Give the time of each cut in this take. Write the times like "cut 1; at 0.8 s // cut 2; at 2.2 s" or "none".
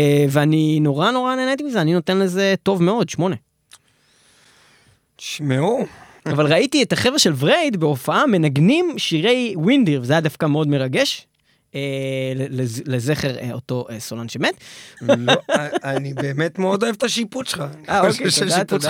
cut 1; at 6.2 s // cut 2; at 15.0 s